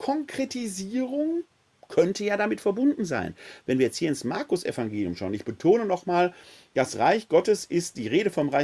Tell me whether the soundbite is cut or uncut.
uncut